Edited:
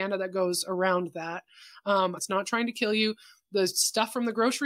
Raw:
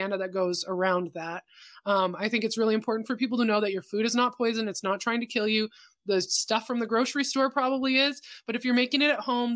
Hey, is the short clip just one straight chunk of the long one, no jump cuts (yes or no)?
no